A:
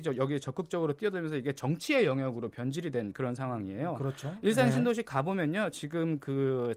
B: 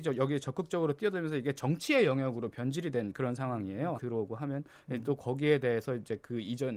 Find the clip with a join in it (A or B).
B